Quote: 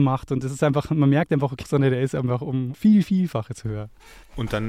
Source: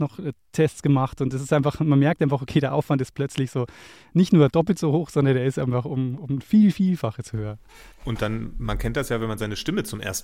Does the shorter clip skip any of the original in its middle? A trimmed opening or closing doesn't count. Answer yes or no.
yes